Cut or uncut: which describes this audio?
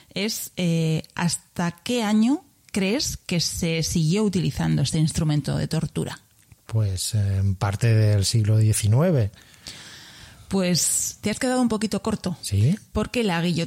uncut